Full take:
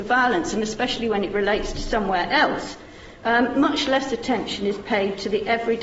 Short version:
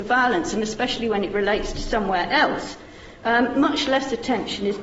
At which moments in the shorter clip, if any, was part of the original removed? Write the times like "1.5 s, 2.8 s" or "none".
none